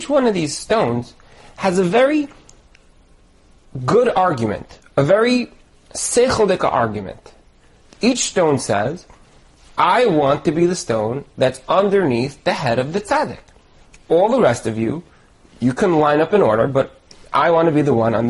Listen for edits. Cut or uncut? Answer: uncut